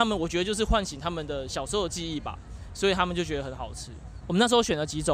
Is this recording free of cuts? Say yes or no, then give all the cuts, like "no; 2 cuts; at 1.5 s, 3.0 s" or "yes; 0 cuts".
no; 1 cut; at 4.2 s